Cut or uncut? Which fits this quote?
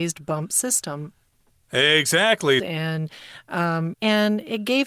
cut